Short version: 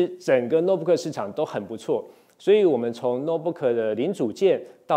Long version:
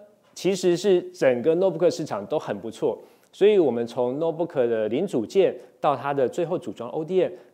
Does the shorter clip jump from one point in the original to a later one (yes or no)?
no